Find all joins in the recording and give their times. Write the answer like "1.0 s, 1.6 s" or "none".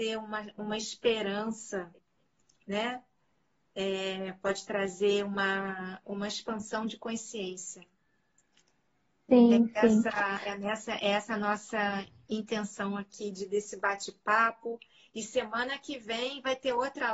none